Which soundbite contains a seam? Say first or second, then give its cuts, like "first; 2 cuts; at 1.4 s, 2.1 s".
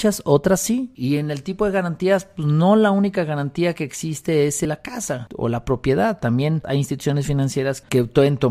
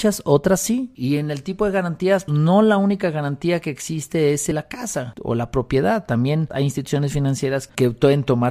second; 1 cut; at 2.3 s